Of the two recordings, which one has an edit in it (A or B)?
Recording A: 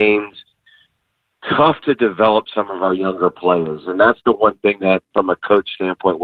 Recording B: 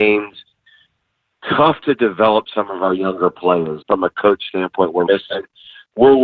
B